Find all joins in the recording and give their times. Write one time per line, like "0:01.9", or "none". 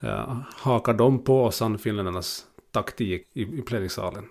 0:03.2